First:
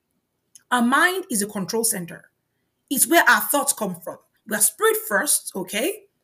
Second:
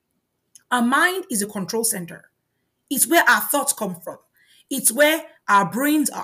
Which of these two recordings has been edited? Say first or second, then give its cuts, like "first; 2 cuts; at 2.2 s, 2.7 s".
first; 1 cut; at 4.4 s